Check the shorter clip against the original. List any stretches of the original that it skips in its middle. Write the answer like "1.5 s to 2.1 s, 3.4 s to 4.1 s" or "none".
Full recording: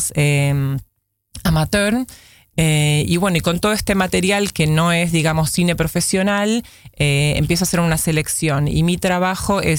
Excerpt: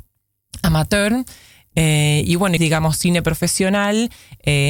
3.4 s to 5.1 s